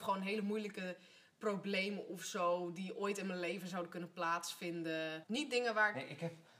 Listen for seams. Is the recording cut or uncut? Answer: cut